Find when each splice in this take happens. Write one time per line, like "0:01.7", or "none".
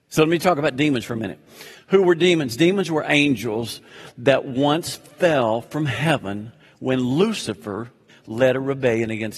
0:08.1